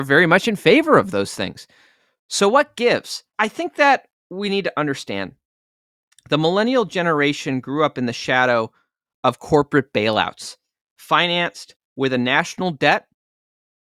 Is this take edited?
yes; 1 cut; at 3.3 s

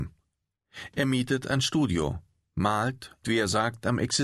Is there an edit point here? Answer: yes; 1 cut; at 3.2 s

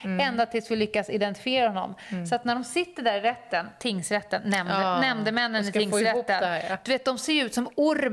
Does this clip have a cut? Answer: no; 0 cuts

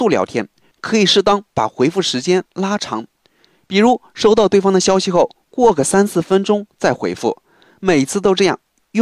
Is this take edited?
no; 0 cuts

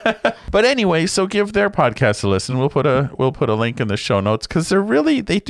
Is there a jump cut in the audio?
no; 0 cuts

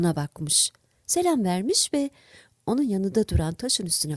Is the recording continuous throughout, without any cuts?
yes; 0 cuts

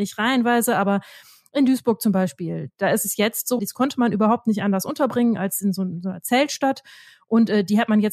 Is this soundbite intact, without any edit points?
no; 1 cut; at 3.6 s

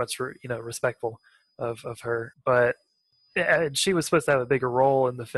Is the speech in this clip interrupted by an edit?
yes; 1 cut; at 2.3 s

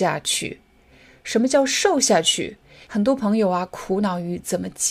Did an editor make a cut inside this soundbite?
yes; 1 cut; at 2.8 s

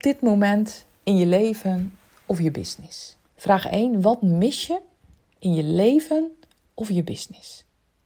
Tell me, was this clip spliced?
yes; 1 cut; at 3.2 s

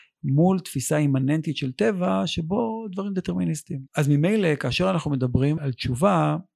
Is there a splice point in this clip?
yes; 2 cuts; at 3.9 s, 5.6 s

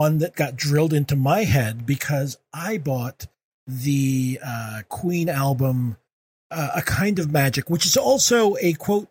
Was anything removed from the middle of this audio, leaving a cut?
no; 0 cuts

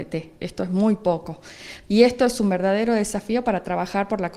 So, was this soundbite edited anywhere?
yes; 1 cut; at 1.9 s

